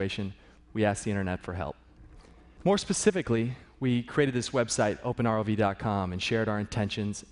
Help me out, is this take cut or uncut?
uncut